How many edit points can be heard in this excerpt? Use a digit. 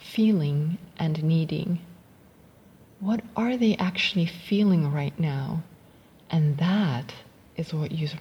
1